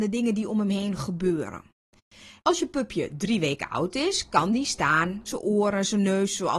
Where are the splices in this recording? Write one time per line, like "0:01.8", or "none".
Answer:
0:02.4
0:05.3